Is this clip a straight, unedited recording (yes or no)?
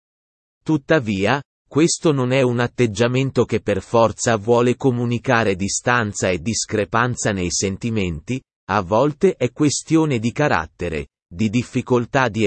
yes